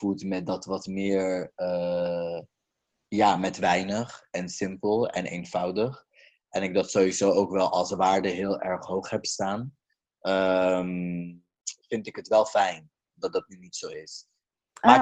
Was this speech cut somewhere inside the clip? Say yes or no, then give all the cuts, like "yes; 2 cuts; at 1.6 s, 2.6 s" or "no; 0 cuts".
no; 0 cuts